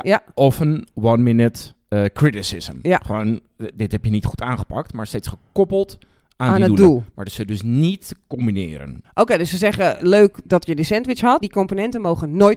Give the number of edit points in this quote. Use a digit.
2